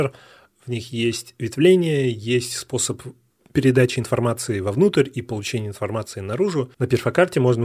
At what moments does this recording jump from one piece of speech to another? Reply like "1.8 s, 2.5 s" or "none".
6.8 s